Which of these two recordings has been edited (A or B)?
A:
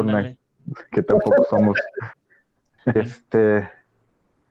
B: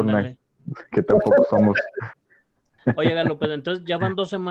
A